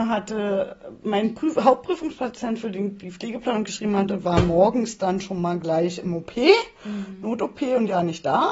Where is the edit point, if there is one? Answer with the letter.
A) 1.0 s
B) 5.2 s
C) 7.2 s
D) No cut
D